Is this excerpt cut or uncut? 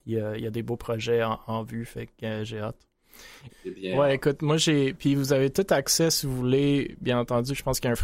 cut